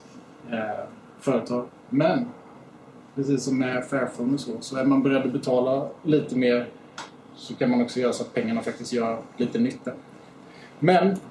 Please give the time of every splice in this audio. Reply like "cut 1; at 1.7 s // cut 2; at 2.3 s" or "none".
cut 1; at 1.7 s